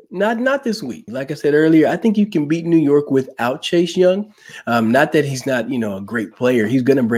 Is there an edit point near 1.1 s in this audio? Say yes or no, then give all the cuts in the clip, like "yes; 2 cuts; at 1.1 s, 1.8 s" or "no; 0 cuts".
yes; 1 cut; at 1.1 s